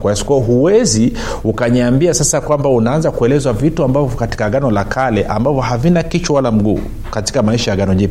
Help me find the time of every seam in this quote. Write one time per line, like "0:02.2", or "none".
none